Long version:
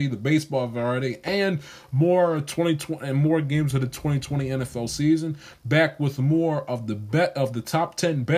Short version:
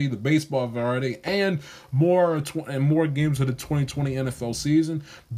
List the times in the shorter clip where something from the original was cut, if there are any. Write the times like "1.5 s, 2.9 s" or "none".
2.4 s